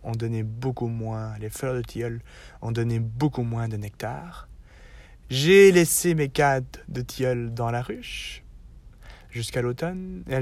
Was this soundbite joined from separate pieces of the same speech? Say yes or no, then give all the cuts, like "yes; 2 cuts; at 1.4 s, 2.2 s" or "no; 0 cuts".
yes; 1 cut; at 5.2 s